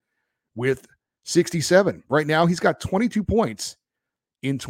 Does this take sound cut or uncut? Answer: uncut